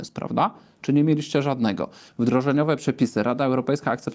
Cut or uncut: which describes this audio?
cut